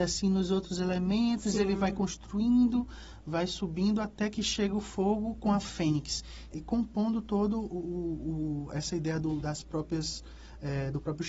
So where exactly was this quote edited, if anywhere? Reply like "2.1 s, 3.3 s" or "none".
6.5 s, 9.4 s